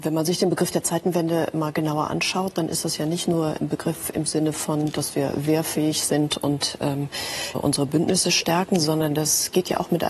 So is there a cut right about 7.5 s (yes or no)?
yes